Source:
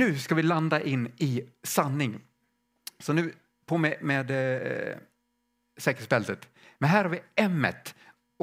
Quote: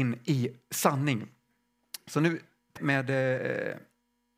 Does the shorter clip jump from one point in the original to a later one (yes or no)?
yes